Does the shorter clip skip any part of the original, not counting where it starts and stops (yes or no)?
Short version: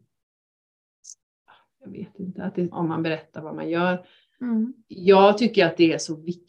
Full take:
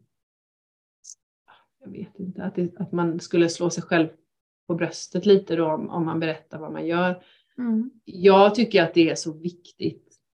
yes